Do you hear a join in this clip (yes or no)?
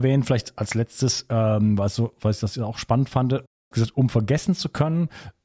no